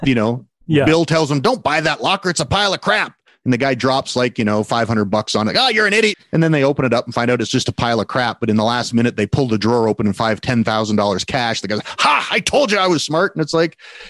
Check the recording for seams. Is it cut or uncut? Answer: cut